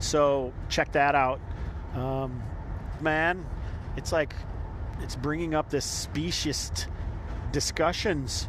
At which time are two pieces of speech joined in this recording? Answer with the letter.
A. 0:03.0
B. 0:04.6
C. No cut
A